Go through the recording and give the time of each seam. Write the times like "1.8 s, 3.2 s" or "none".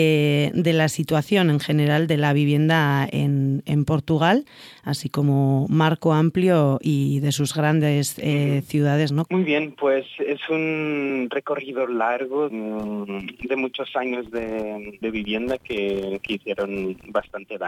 9.3 s, 12.5 s, 15.0 s